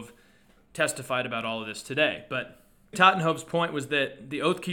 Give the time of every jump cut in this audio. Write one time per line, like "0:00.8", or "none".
0:02.9